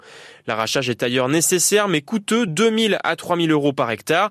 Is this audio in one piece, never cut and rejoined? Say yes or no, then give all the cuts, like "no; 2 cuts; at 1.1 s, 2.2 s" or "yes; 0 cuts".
yes; 0 cuts